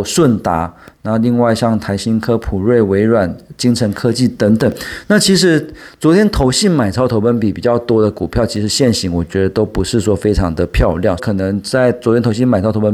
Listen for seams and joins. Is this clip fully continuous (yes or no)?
no